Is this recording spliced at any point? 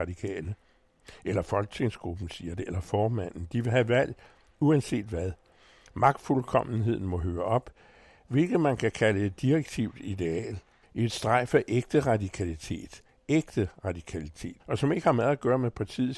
yes; 2 cuts; at 10.8 s, 14.6 s

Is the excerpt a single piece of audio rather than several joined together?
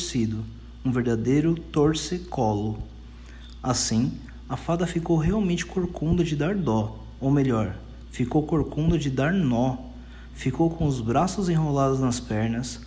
yes; 0 cuts

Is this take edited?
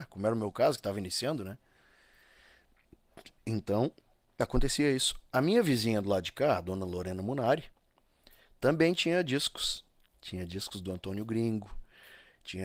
no; 0 cuts

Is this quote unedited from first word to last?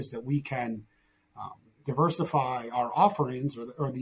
yes; 0 cuts

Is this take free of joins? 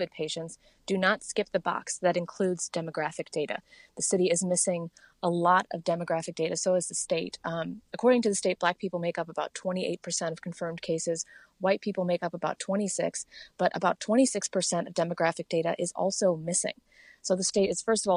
yes; 0 cuts

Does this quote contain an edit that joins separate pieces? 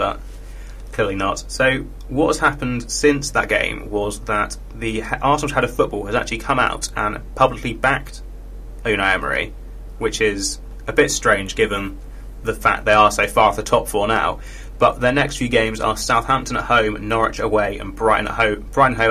no; 0 cuts

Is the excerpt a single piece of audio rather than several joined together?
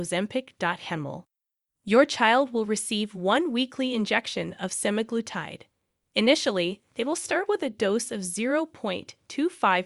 no; 1 cut; at 1.7 s

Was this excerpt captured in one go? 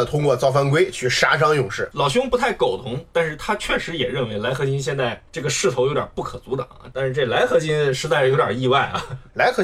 no; 2 cuts; at 1.9 s, 6.9 s

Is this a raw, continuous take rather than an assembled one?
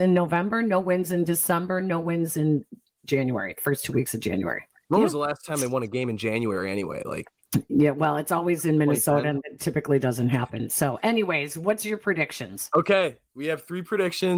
yes; 0 cuts

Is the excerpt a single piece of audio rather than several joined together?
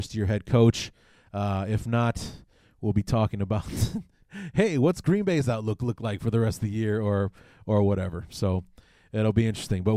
yes; 0 cuts

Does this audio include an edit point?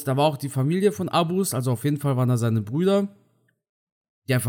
no; 0 cuts

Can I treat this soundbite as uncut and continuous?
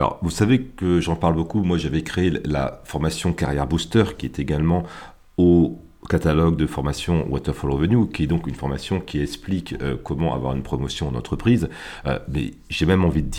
yes; 0 cuts

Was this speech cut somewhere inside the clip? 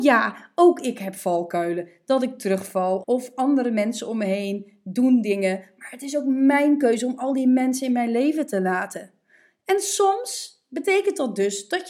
yes; 1 cut; at 3.0 s

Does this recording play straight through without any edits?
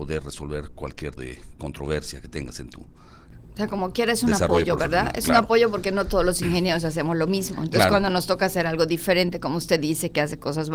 no; 1 cut; at 1.2 s

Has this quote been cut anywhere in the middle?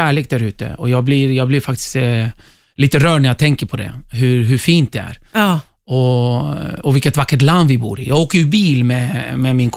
no; 0 cuts

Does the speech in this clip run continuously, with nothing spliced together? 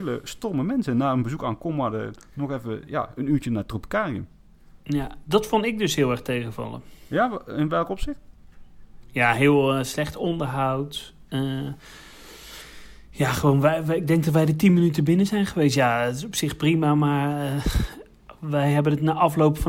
no; 1 cut; at 4.8 s

